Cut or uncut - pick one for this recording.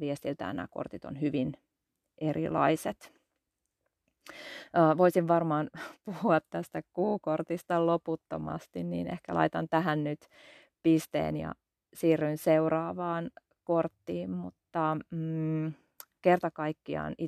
uncut